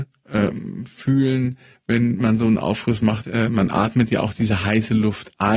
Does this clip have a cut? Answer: yes; 1 cut; at 3.2 s

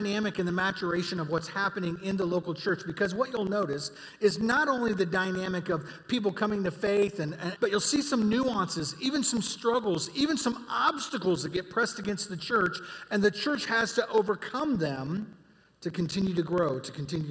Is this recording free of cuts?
no; 1 cut; at 7.6 s

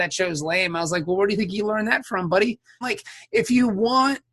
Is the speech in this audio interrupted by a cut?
yes; 1 cut; at 2.8 s

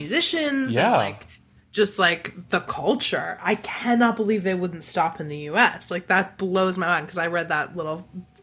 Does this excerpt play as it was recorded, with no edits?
yes; 0 cuts

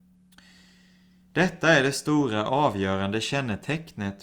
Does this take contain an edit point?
no; 0 cuts

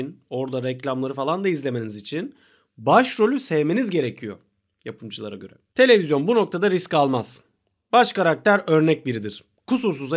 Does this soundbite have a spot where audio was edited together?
no; 0 cuts

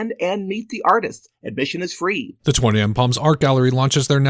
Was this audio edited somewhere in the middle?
yes; 1 cut; at 2.4 s

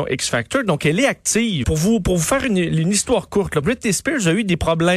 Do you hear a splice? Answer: yes; 2 cuts; at 1.6 s, 3.6 s

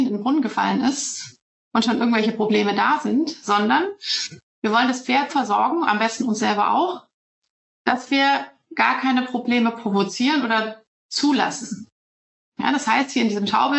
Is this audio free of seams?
no; 1 cut; at 5.3 s

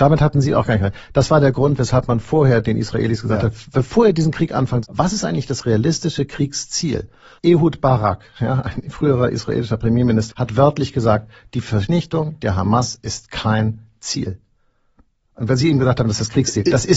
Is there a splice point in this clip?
yes; 3 cuts; at 4.8 s, 7.4 s, 10.3 s

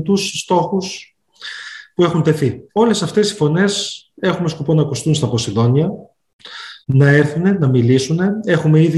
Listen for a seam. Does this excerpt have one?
yes; 2 cuts; at 2.7 s, 6.8 s

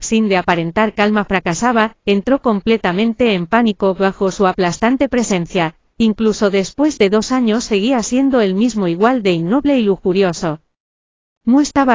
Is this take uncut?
yes; 0 cuts

